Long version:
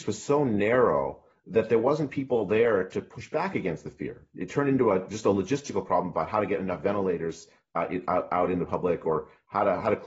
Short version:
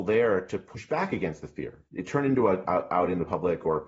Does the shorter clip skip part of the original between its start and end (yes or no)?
yes